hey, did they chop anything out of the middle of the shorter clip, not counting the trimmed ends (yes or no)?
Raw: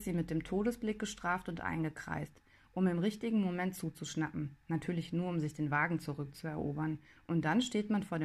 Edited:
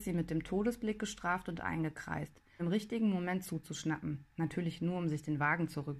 yes